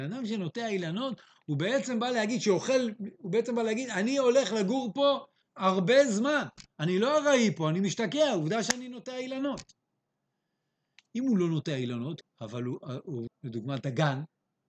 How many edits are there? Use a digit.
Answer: 2